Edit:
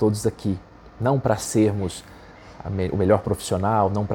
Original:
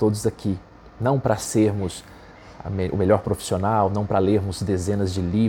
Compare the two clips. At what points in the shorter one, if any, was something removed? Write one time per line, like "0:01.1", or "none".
none